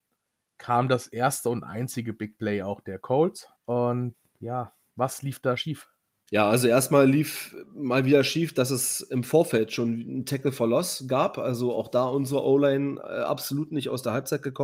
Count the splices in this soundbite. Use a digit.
1